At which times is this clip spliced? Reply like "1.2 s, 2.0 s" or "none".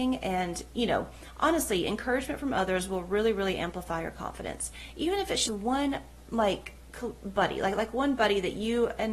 5.5 s